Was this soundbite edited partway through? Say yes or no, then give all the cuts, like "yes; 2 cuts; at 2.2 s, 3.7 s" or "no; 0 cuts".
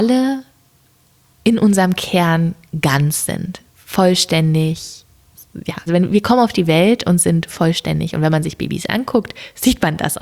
yes; 1 cut; at 5.9 s